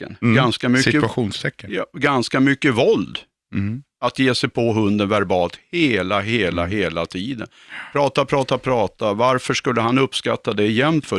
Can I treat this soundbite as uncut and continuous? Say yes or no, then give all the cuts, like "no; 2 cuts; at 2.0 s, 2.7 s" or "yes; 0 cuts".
yes; 0 cuts